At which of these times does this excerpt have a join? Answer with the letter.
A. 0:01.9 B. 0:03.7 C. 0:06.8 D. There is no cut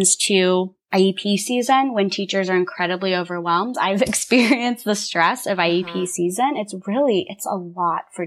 B